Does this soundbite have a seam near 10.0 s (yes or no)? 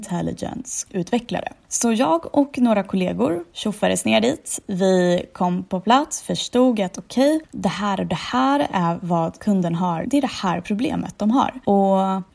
yes